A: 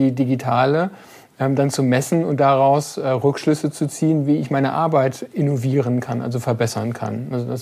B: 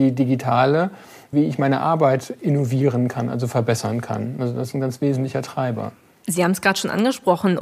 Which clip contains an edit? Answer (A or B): B